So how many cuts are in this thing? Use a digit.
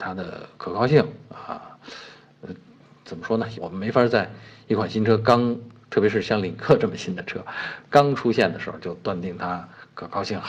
1